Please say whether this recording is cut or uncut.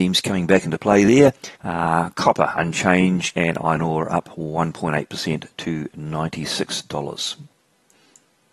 cut